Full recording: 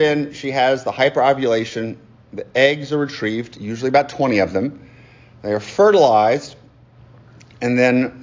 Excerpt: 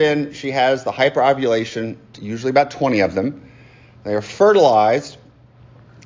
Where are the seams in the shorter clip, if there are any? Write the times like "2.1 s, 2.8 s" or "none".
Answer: 2.1 s